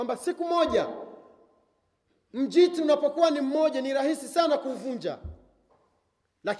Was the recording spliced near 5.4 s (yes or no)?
no